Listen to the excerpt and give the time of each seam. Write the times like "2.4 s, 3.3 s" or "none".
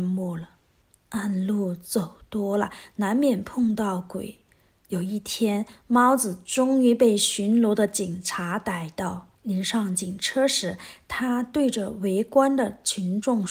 1.0 s, 9.4 s